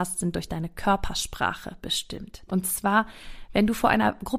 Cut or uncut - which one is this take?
cut